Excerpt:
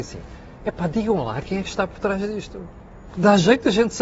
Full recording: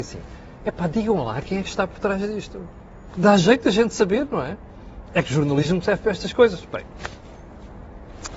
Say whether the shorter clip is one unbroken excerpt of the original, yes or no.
yes